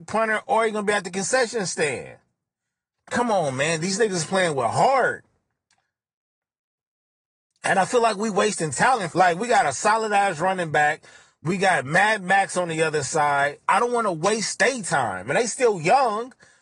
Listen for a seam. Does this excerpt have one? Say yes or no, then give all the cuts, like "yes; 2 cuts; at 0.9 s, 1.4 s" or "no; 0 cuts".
yes; 2 cuts; at 2.9 s, 9.1 s